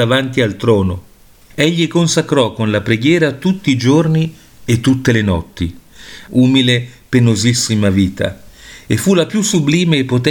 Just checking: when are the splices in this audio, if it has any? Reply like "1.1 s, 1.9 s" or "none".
1.5 s, 6.3 s